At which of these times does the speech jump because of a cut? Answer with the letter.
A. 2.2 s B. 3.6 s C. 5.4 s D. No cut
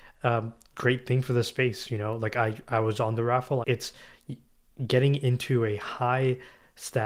B